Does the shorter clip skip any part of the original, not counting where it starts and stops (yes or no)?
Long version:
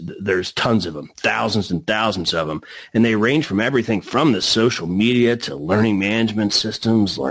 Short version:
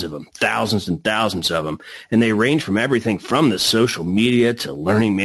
no